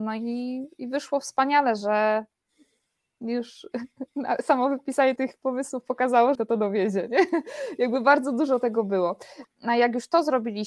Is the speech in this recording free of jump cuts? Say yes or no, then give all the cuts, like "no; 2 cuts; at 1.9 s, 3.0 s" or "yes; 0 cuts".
no; 3 cuts; at 5.2 s, 6.4 s, 9.4 s